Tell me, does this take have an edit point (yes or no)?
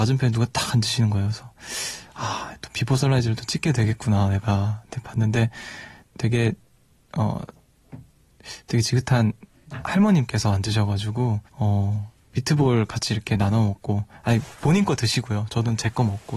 yes